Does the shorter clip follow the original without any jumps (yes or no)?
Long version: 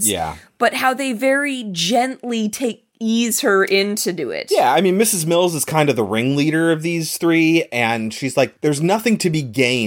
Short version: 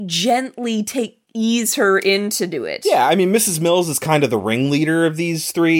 yes